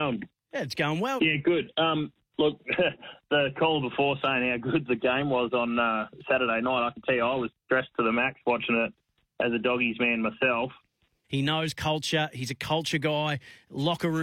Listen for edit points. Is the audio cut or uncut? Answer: cut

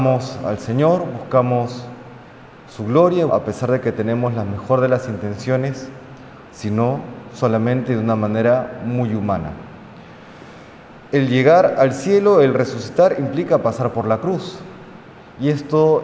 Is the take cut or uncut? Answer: cut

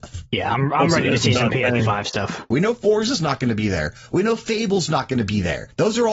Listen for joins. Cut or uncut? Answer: cut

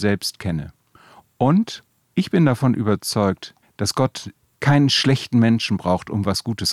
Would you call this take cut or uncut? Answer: uncut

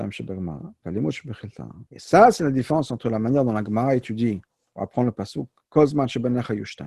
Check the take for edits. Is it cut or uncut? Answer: cut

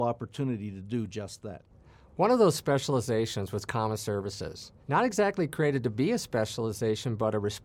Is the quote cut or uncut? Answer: cut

